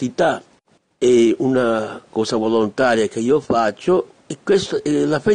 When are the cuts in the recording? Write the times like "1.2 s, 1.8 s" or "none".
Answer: 4.2 s